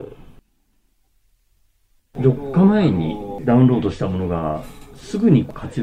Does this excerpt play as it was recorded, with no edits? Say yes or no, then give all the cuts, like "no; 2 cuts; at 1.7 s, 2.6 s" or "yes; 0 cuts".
no; 1 cut; at 2.1 s